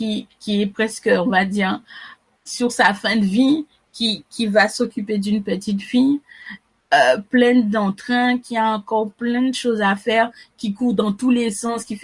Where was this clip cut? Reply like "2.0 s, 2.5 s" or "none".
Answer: none